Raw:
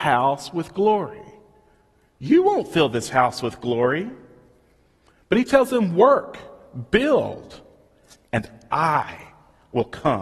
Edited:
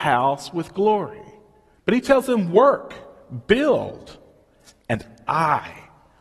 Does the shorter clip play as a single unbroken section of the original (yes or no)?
no